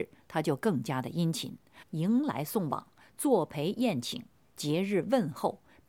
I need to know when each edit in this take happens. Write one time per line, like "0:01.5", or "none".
0:01.8